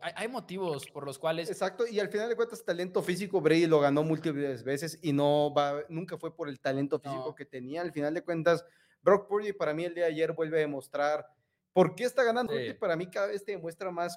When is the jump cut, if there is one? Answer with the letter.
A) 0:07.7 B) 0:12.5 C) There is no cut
B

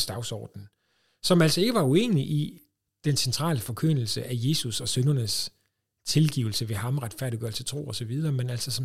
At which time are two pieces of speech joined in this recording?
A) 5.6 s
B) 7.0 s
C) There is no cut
C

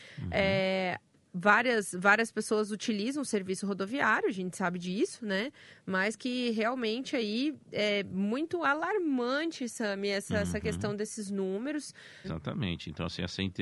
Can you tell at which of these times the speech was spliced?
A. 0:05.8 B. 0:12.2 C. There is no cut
B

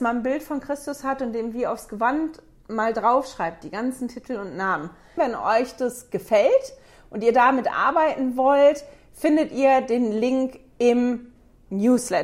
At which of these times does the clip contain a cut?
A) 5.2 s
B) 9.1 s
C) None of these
A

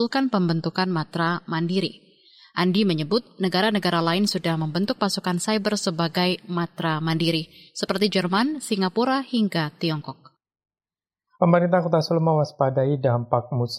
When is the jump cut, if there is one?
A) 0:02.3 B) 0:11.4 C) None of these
B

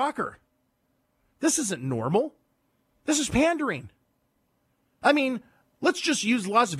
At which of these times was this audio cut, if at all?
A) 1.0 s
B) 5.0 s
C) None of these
B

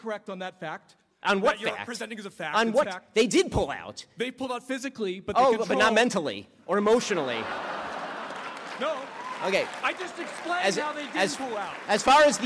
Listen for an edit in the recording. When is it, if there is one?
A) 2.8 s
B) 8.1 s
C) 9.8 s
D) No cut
A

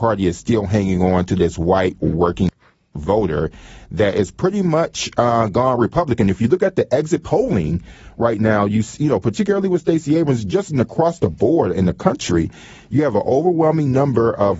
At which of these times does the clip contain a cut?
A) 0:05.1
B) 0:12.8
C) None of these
C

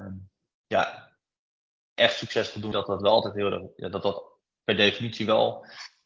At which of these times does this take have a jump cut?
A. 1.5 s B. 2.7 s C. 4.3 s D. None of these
B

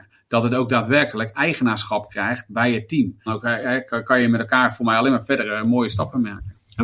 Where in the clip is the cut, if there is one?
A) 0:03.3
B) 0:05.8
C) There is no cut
A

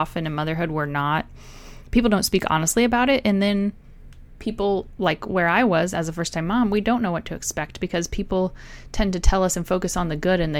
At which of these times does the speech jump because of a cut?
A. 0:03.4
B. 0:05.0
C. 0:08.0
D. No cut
B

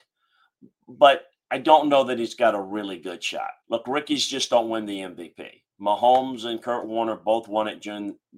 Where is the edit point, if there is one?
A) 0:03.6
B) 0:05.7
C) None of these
A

